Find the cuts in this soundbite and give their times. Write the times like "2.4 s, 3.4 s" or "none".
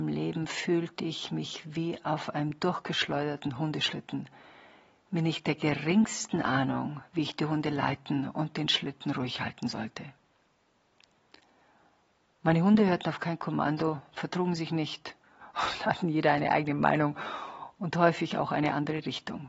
none